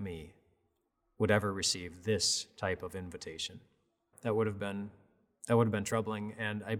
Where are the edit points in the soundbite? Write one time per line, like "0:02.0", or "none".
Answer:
0:04.1